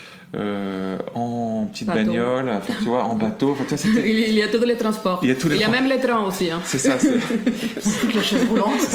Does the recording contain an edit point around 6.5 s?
no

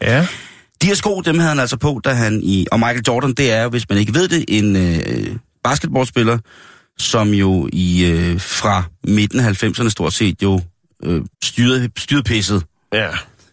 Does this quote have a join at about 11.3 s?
yes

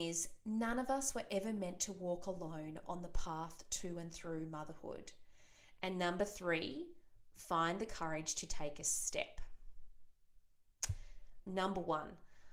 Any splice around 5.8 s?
yes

